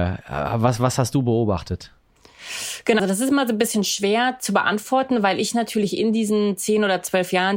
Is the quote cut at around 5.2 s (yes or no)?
no